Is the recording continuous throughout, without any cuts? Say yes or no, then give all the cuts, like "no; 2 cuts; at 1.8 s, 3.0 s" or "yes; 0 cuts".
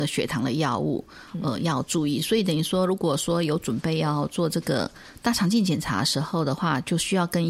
yes; 0 cuts